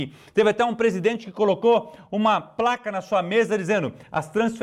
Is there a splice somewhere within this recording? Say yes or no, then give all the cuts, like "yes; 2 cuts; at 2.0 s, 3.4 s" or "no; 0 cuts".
no; 0 cuts